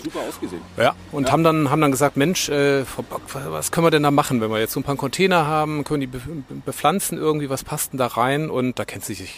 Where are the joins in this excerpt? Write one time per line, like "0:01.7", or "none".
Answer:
none